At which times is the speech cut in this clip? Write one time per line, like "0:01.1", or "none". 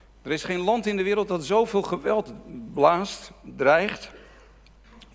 none